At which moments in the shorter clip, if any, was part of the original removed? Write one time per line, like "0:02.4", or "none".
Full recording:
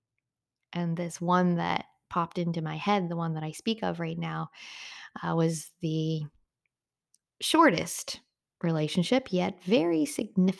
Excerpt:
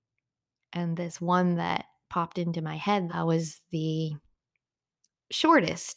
0:03.1